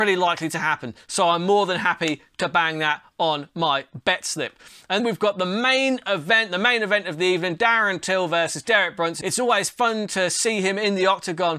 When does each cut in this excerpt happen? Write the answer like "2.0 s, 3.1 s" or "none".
5.0 s, 9.2 s

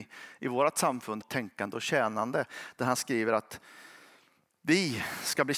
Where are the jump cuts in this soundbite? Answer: 1.2 s

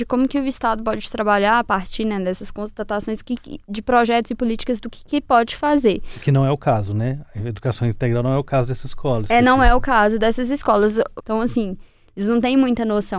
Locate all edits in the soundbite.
11.2 s

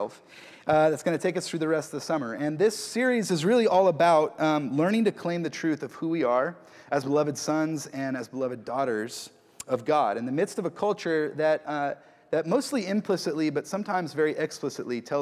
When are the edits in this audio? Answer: none

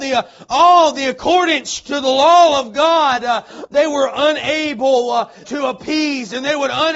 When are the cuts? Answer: 3.7 s, 5.4 s

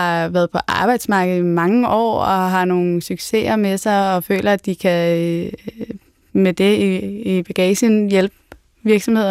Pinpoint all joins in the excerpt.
none

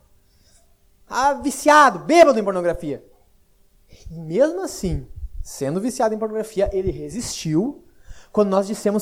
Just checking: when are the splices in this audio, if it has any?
none

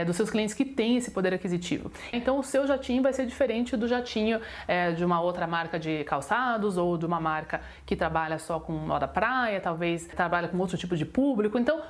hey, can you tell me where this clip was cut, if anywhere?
2.1 s

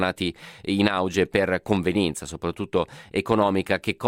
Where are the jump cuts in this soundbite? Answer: none

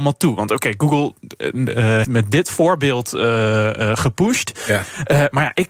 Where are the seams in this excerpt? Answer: 2.0 s

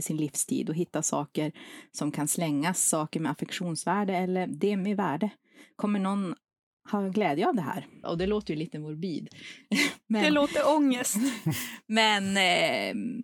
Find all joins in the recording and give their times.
8.0 s

